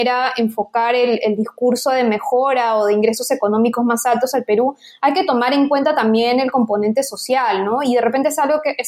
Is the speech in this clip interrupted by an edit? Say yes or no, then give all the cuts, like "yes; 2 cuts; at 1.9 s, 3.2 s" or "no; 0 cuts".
no; 0 cuts